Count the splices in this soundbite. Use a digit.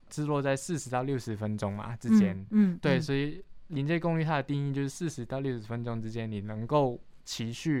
0